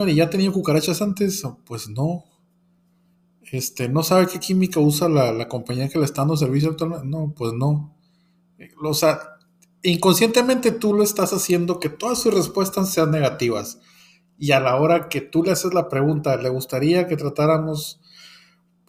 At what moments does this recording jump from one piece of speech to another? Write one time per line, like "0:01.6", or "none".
none

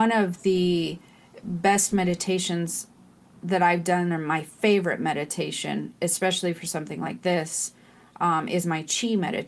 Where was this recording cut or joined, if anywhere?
none

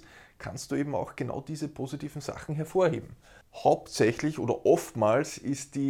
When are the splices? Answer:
0:03.4

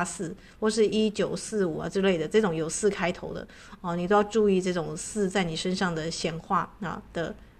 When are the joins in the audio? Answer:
none

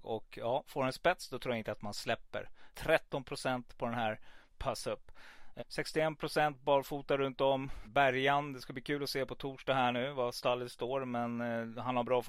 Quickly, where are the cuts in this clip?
0:02.7
0:05.6
0:07.8

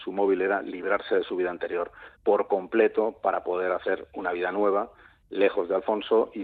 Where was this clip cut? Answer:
0:02.1

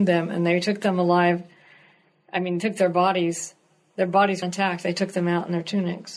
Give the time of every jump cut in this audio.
0:04.4

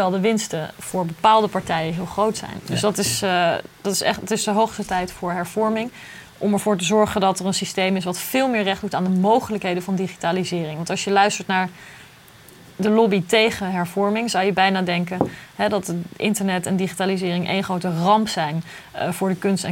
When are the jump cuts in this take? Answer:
none

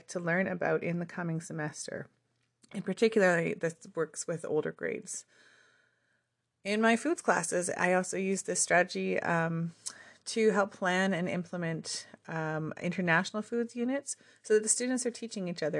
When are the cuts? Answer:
none

